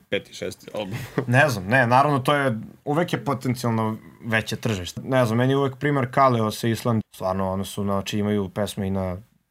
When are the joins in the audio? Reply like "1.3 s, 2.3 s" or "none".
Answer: 5.0 s, 7.0 s